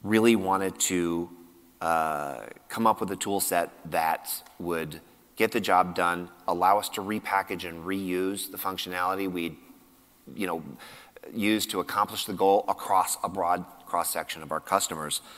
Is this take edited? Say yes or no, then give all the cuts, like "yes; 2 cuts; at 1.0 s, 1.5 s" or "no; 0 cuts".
no; 0 cuts